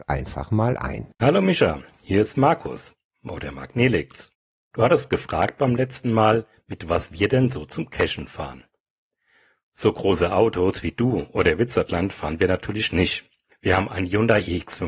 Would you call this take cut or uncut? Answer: uncut